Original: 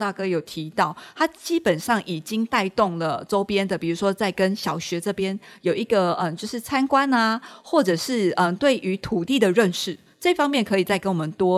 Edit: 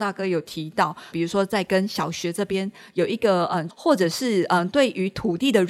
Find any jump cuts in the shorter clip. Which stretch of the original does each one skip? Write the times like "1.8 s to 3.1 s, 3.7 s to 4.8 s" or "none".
1.1 s to 3.8 s, 6.4 s to 7.6 s